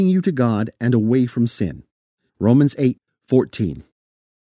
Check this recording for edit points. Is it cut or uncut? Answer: cut